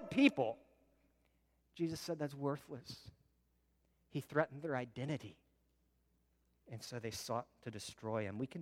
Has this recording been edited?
no; 0 cuts

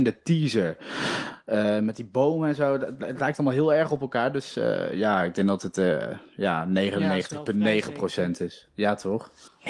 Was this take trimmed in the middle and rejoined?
no; 0 cuts

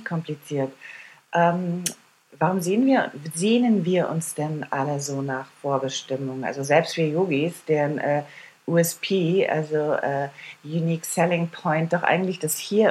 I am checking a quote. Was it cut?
no; 0 cuts

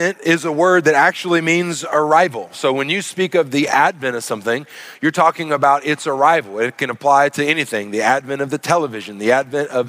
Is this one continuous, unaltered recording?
yes; 0 cuts

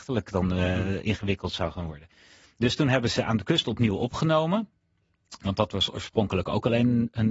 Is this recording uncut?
yes; 0 cuts

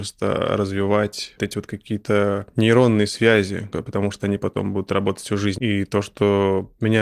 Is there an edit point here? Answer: yes; 3 cuts; at 1.4 s, 3.7 s, 5.6 s

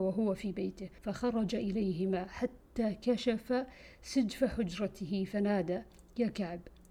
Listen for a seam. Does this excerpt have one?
yes; 1 cut; at 1.0 s

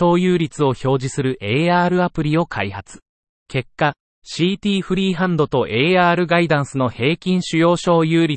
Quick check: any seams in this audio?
yes; 1 cut; at 3.4 s

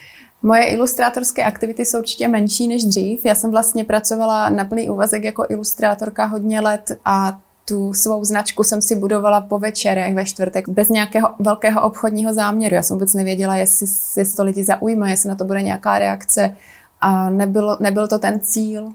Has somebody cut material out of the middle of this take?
yes; 1 cut; at 10.7 s

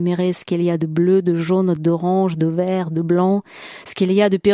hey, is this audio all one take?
yes; 0 cuts

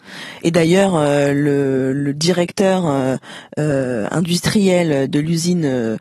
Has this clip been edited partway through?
no; 0 cuts

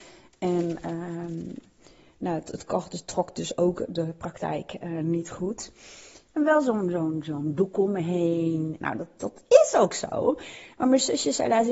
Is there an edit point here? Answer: yes; 1 cut; at 8.8 s

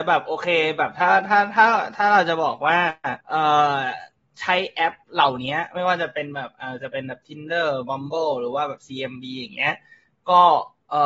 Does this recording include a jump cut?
yes; 2 cuts; at 3.2 s, 5.0 s

